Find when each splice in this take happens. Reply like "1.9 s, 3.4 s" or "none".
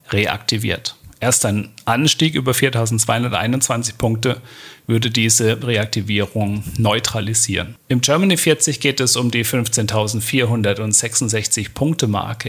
none

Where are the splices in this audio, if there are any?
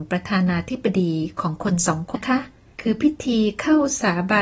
2.1 s

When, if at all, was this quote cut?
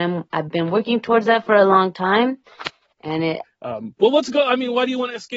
3.4 s

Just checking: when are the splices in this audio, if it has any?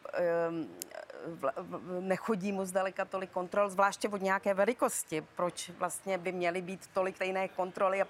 7.1 s

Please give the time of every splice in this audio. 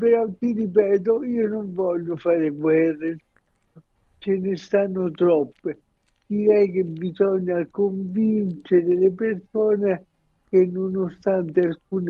none

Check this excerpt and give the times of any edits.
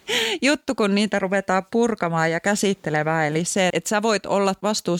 3.7 s

